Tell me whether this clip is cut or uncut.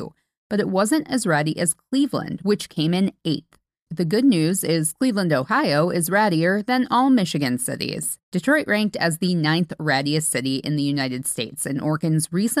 cut